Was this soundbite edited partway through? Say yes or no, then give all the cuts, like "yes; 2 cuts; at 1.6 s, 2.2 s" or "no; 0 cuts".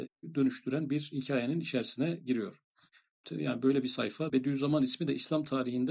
yes; 2 cuts; at 3.2 s, 4.3 s